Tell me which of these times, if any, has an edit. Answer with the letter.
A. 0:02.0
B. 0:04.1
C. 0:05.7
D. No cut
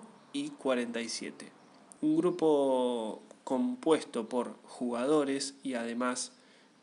A